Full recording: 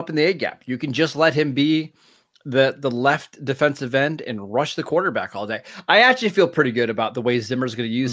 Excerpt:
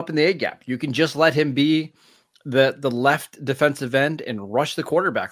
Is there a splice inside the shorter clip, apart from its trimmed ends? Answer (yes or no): no